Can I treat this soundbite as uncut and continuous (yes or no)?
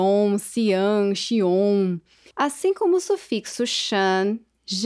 no